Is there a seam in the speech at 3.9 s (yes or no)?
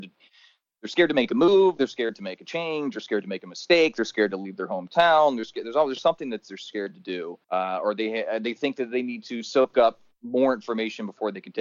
no